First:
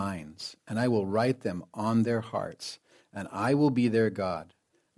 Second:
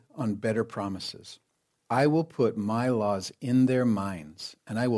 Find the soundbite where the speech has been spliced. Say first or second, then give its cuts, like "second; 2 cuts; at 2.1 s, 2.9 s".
second; 1 cut; at 1.7 s